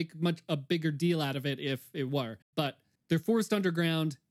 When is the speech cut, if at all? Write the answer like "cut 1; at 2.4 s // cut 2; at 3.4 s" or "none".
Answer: cut 1; at 2.4 s